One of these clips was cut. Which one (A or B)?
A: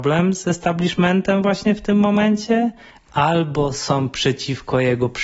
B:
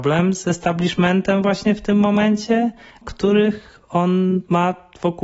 B